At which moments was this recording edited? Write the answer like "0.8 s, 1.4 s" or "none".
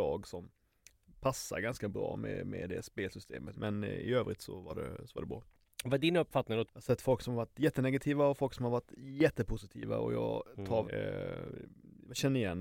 3.5 s, 6.7 s, 10.8 s